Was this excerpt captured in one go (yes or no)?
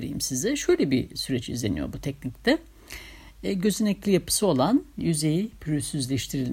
yes